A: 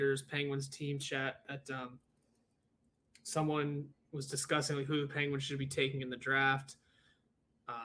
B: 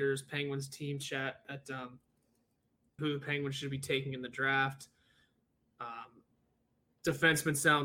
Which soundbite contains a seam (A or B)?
B